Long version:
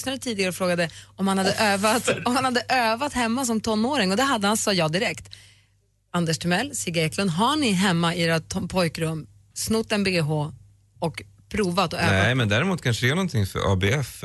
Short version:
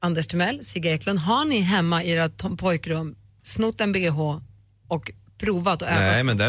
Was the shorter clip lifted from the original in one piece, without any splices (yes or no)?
yes